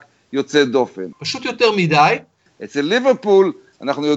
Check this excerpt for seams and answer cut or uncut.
cut